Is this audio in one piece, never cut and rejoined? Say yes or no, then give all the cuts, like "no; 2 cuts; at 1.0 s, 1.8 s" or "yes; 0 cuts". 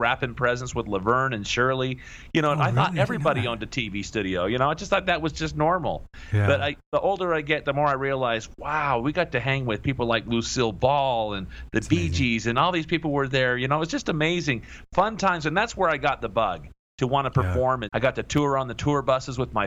no; 1 cut; at 17.9 s